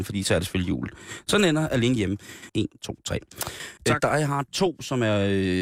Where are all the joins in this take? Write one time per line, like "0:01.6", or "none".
0:02.5
0:03.8